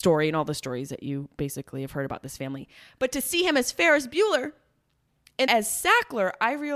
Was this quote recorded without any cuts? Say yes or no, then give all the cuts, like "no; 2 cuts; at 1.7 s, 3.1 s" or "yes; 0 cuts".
no; 1 cut; at 5.5 s